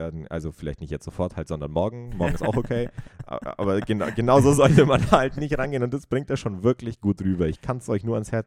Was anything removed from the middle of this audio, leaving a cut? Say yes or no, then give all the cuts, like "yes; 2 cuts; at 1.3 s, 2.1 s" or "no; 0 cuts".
no; 0 cuts